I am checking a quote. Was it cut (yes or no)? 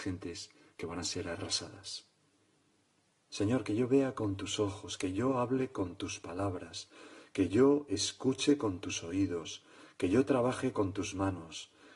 yes